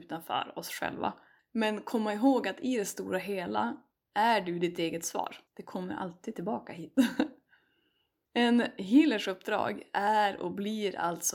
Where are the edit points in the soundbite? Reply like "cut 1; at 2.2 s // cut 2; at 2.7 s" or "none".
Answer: cut 1; at 1.4 s // cut 2; at 5.5 s